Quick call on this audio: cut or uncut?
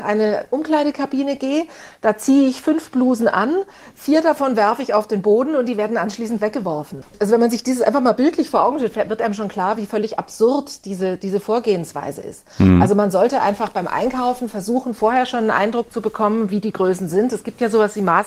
uncut